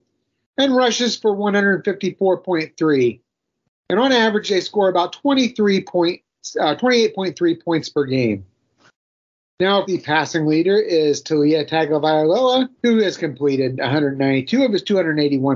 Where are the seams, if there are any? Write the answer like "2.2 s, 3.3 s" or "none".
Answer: 9.8 s, 12.8 s